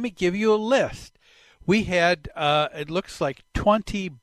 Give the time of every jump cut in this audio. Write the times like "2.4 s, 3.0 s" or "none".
none